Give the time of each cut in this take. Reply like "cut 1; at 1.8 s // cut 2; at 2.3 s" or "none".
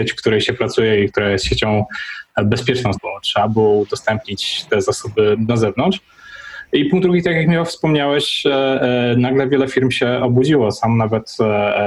cut 1; at 2.9 s